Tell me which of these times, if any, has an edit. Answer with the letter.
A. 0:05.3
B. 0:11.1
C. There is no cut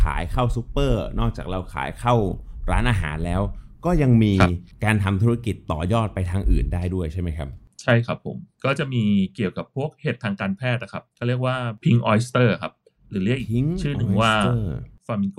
B